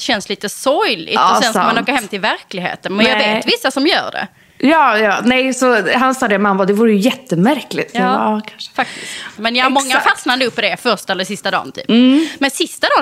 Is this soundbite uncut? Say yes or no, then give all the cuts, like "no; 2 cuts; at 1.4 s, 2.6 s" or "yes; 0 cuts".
no; 1 cut; at 9.4 s